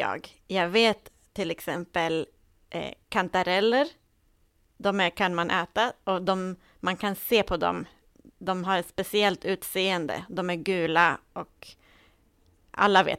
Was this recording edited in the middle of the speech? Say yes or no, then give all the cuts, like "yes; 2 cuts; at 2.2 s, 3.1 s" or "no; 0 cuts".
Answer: no; 0 cuts